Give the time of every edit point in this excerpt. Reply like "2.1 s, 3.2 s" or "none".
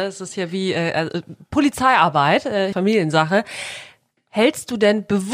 2.7 s